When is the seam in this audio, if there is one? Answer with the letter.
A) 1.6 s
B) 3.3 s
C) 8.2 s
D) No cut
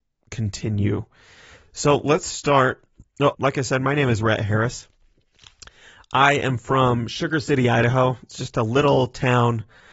B